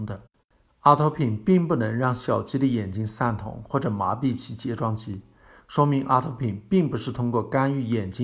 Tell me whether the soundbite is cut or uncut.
uncut